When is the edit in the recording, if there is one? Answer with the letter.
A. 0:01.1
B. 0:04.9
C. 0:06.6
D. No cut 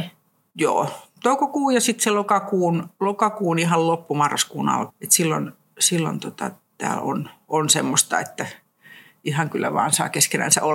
B